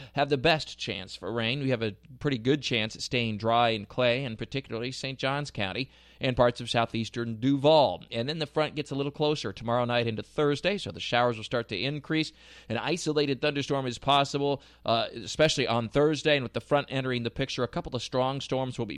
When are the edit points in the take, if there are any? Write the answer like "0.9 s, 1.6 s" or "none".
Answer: none

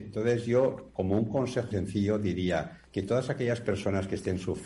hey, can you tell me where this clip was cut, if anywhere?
1.7 s, 2.9 s

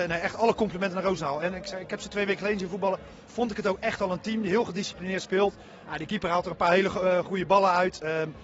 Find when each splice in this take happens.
none

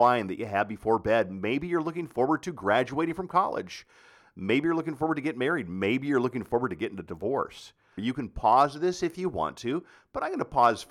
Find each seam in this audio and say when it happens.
8.0 s

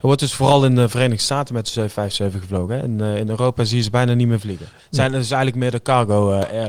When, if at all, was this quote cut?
none

